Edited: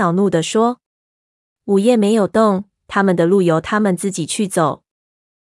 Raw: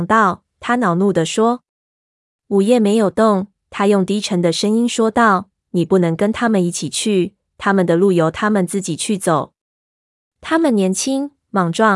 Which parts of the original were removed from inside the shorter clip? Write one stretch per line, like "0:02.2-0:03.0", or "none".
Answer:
0:03.6-0:07.5

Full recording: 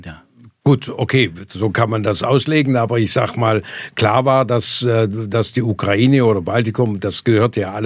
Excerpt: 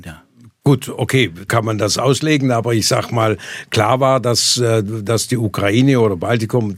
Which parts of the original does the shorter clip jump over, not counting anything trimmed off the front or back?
0:01.5-0:01.7

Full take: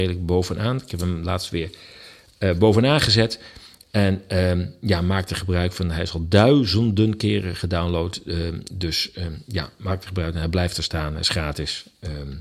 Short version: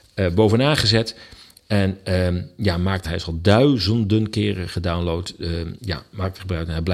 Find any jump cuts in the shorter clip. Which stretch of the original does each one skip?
0:05.3-0:05.9
0:08.6-0:09.4

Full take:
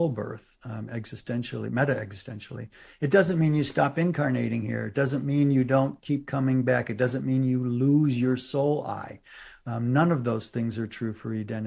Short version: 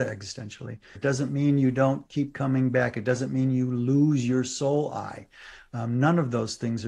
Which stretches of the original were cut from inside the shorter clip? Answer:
0:02.9-0:04.9

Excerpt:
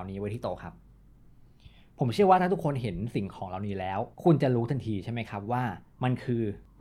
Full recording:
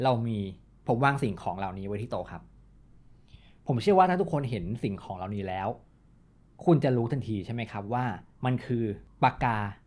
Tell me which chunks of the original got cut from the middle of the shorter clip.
0:05.8-0:06.5

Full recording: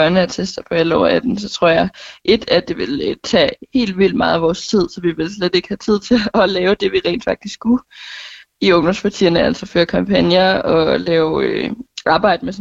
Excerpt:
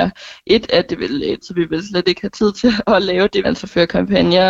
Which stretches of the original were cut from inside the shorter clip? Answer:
0:03.2-0:04.9
0:06.9-0:09.4

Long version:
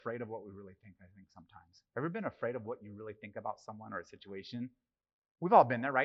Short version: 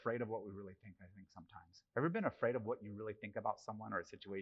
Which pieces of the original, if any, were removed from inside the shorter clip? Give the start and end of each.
none

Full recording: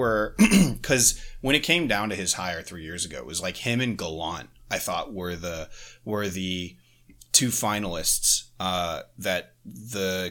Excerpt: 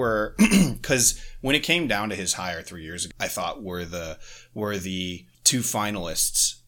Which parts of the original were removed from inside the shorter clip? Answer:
0:03.1-0:04.6
0:06.9-0:07.2

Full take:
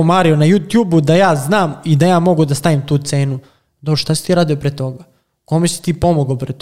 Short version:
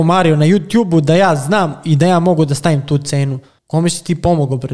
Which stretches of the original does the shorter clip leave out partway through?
0:03.6-0:05.4

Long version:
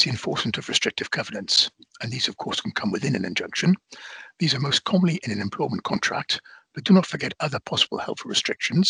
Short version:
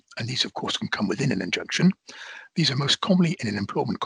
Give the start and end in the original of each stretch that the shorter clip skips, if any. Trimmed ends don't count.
none

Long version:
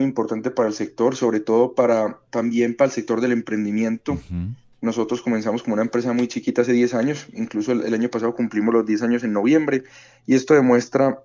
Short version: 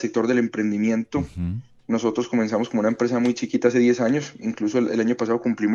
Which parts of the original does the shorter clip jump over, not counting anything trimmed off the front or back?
none

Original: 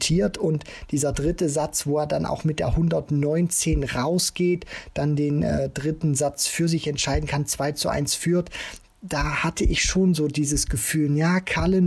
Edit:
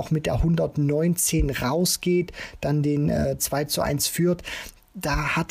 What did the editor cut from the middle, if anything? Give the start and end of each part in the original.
0:05.7-0:07.5

